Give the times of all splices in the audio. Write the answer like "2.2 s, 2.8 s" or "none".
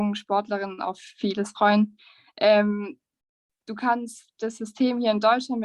none